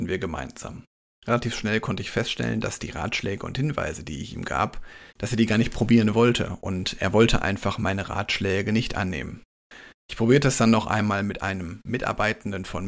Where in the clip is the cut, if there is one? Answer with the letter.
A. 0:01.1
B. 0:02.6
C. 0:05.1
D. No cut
C